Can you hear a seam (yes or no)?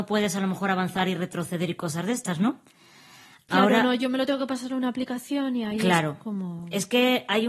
no